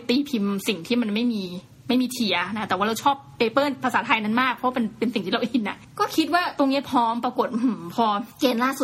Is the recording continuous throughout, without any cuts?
yes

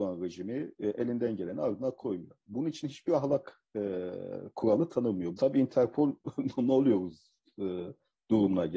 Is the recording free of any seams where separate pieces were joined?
no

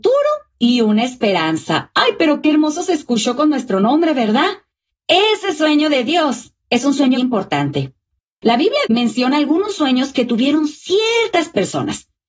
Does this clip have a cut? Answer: yes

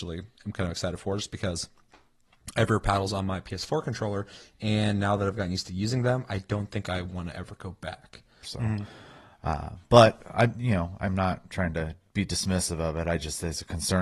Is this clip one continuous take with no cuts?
no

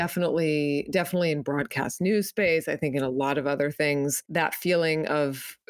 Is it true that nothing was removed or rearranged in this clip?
yes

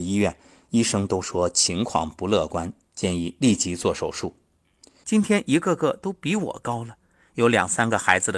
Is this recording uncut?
no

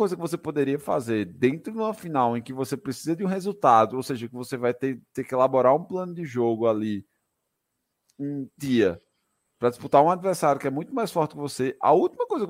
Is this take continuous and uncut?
no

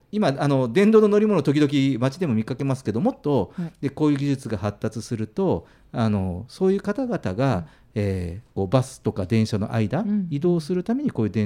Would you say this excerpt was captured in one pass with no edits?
yes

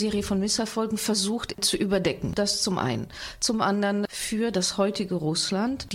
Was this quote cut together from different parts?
yes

